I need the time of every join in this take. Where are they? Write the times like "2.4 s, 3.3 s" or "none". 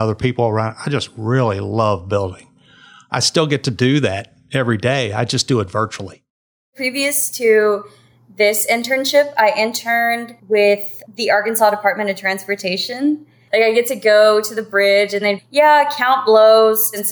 15.4 s